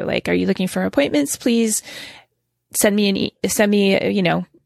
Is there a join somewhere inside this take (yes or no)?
no